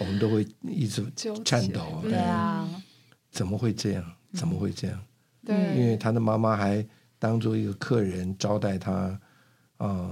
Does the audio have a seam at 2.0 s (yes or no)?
no